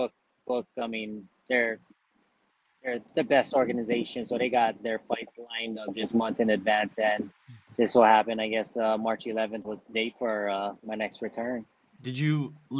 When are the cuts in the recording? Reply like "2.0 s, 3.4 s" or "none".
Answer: none